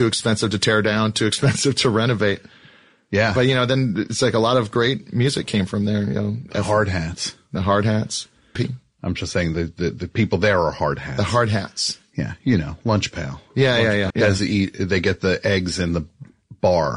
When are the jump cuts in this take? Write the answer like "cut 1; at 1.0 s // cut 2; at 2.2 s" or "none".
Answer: cut 1; at 8.6 s // cut 2; at 14.1 s